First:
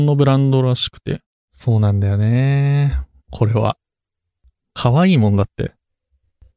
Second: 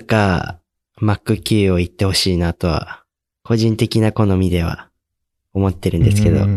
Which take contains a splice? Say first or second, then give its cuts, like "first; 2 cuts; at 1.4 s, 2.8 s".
first; 2 cuts; at 1.5 s, 3.2 s